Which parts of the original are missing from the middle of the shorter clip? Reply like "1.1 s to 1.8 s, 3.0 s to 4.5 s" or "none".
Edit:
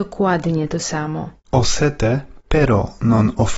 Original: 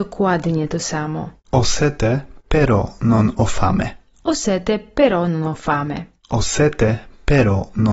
none